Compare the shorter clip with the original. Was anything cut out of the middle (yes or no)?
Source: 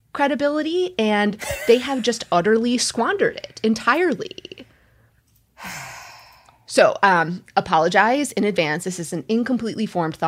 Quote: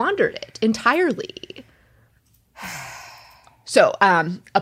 no